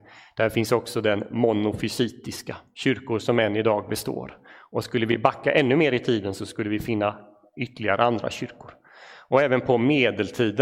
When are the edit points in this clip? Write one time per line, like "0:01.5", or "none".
none